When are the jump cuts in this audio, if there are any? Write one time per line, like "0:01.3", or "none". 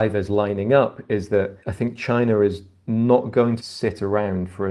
0:01.6
0:03.6